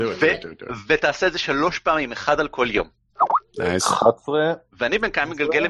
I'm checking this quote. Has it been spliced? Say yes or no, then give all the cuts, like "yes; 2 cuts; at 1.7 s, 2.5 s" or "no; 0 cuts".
no; 0 cuts